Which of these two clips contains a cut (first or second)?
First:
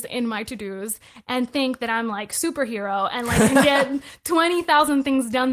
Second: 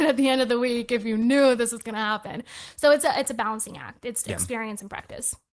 second